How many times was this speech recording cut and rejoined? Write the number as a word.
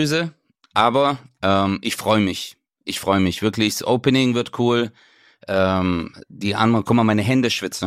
zero